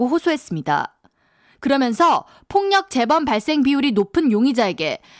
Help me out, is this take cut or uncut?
uncut